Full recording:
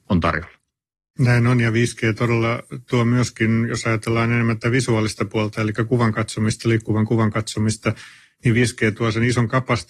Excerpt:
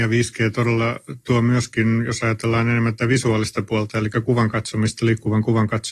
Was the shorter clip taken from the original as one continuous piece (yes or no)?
yes